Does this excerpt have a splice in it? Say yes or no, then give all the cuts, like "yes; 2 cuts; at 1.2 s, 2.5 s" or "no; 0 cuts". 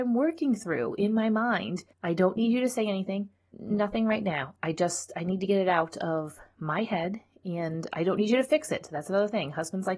yes; 2 cuts; at 1.9 s, 3.5 s